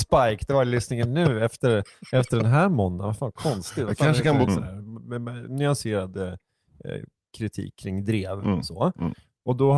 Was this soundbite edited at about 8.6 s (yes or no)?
no